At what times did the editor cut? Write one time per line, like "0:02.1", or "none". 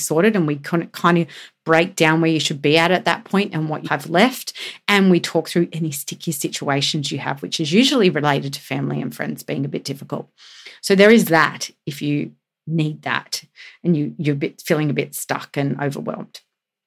0:03.8